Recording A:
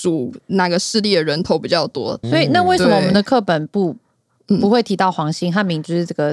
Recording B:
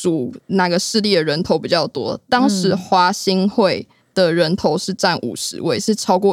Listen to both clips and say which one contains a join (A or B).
A